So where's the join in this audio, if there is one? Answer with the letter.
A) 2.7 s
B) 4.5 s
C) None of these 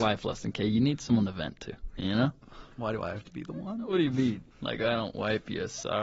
B